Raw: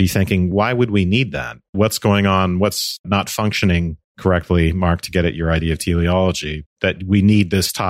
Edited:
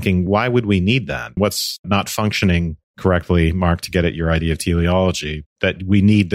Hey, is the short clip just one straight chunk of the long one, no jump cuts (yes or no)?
no